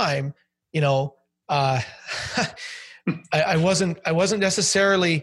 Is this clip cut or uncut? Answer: uncut